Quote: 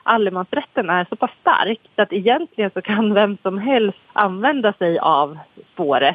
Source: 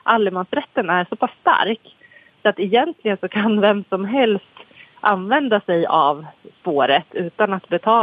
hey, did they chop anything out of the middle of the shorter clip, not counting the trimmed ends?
yes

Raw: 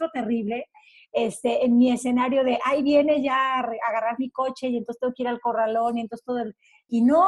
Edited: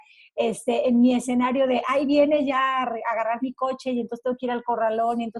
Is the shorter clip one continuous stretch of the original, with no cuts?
yes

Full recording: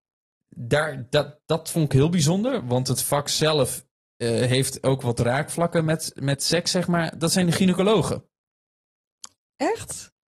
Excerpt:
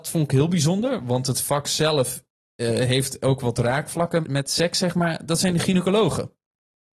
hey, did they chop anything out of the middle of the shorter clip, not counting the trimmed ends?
yes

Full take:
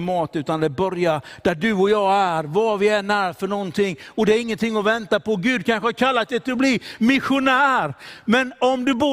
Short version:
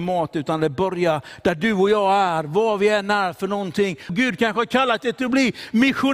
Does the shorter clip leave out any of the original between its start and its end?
yes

